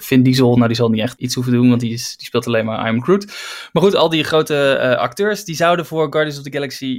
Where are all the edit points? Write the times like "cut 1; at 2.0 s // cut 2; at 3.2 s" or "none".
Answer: cut 1; at 1.2 s